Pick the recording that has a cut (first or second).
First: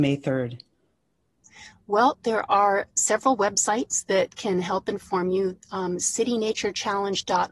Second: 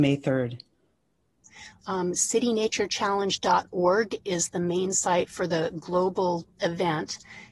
second